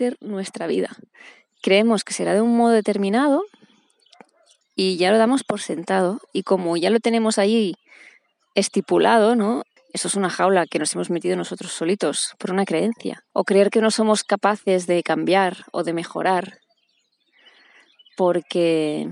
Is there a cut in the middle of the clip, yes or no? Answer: yes